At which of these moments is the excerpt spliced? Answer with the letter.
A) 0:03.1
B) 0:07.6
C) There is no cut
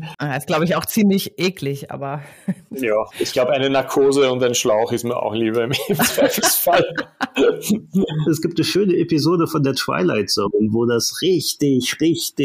A